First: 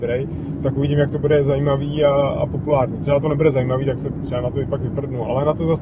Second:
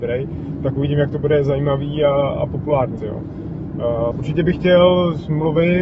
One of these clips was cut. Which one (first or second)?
second